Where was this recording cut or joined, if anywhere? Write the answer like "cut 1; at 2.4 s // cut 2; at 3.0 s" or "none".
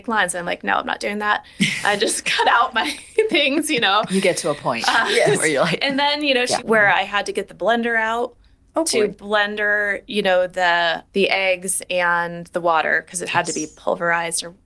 cut 1; at 6.6 s